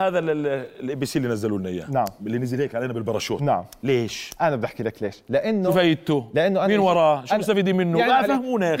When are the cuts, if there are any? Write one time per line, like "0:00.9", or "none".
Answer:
none